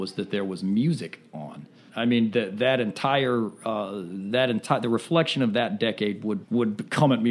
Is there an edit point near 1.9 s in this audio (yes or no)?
yes